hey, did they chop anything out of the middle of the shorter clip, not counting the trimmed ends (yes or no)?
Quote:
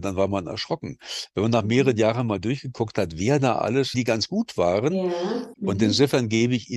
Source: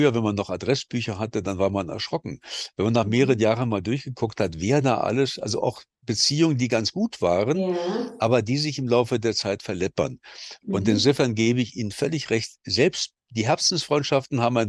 yes